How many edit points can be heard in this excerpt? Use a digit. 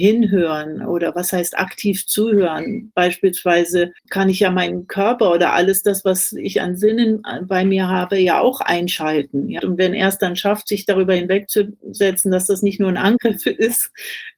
2